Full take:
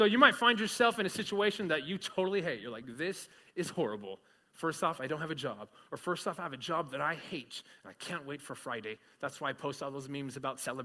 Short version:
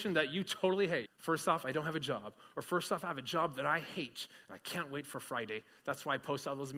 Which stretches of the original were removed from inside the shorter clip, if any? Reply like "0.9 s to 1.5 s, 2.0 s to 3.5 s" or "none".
2.6 s to 4.4 s